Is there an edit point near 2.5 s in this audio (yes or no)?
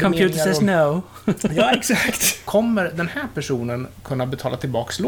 yes